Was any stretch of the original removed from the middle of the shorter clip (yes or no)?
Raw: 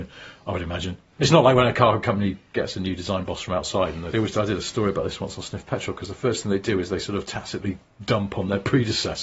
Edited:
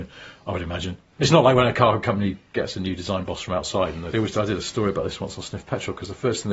no